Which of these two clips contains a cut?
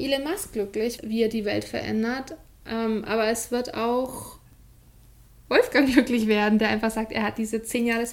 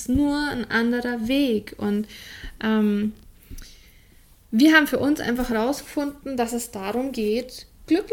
first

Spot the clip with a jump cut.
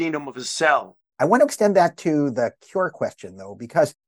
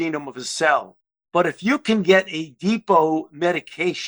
first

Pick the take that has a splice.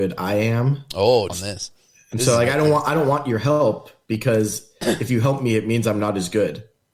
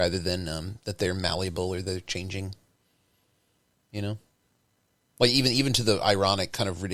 first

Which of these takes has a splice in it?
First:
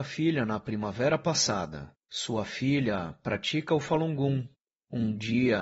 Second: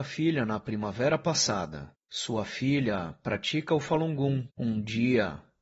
second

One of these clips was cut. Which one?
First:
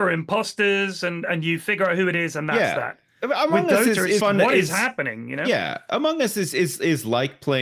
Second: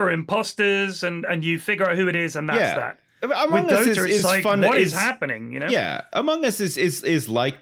first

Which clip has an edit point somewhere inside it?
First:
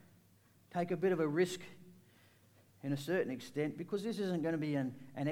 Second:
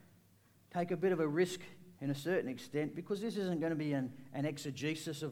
second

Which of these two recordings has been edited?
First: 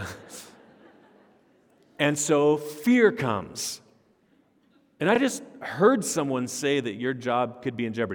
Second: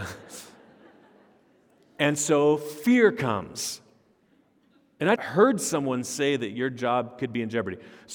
second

